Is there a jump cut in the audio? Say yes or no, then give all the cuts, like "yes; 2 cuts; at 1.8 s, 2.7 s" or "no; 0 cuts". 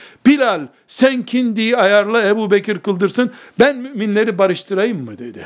no; 0 cuts